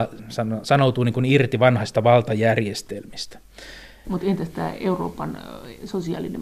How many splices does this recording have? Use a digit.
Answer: 1